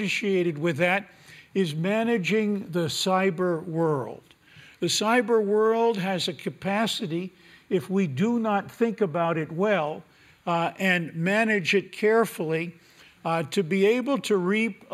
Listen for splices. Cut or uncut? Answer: uncut